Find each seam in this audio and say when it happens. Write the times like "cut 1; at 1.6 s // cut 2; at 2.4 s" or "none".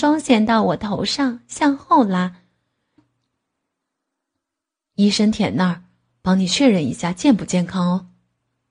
cut 1; at 3.0 s